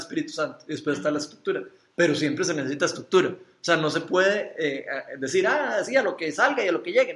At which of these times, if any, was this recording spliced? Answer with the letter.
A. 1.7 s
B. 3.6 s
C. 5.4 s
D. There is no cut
D